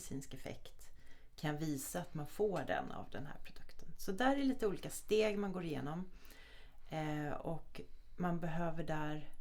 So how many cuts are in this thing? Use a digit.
0